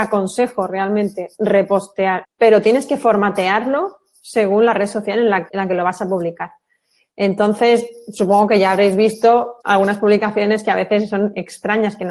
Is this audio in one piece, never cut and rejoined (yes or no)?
no